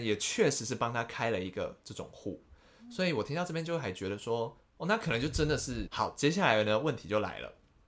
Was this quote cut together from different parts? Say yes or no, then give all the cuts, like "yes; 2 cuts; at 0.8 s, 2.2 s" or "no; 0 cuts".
yes; 1 cut; at 5.9 s